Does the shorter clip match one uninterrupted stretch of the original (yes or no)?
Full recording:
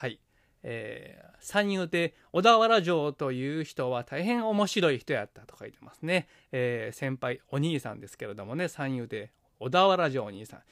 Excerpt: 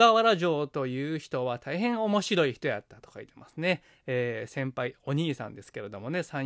yes